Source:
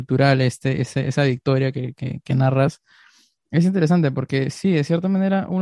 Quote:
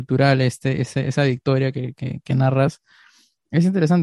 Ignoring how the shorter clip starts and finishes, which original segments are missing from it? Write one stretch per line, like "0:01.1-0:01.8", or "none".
none